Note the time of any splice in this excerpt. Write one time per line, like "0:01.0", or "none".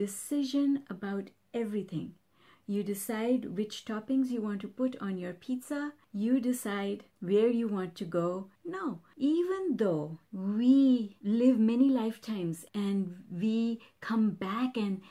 0:08.6
0:10.3